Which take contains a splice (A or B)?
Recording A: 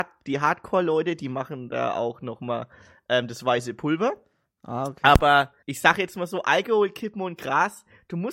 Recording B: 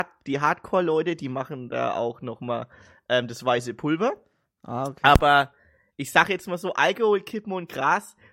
A